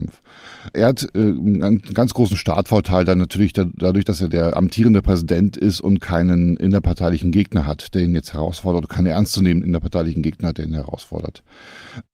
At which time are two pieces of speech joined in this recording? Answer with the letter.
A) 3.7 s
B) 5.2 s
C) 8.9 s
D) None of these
D